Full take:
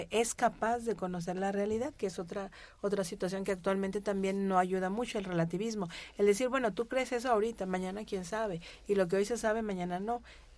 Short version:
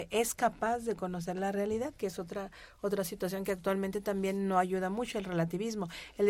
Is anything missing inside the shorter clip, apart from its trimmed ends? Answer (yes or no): no